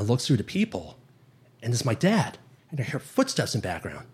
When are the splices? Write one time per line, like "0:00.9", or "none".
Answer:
0:02.6